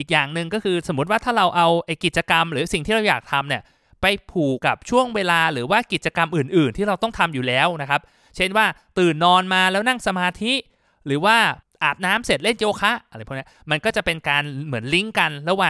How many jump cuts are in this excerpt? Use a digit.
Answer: 1